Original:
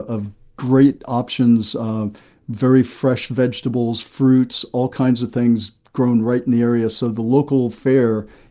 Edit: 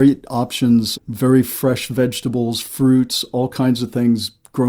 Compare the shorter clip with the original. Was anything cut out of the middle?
yes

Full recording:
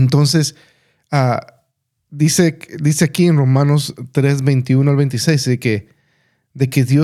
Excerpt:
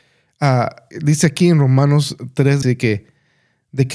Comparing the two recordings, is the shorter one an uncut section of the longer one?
no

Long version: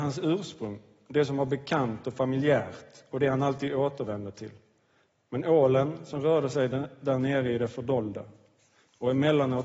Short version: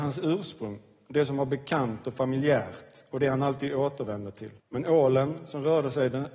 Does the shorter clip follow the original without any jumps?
no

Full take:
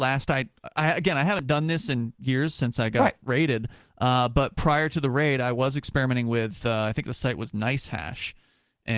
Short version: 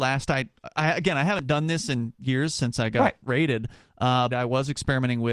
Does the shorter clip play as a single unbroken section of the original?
no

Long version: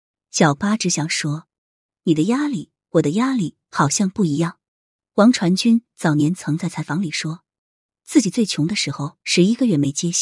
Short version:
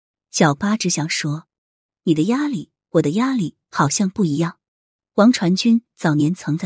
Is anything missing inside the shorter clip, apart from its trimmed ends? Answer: no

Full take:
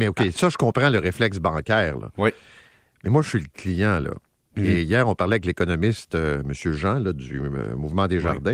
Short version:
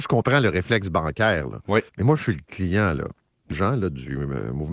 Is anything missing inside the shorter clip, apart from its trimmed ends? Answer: yes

